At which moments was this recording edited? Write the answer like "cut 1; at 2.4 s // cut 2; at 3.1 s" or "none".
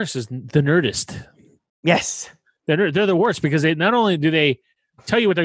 none